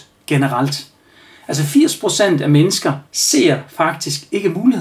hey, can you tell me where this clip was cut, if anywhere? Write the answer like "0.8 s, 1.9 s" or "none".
1.4 s, 3.1 s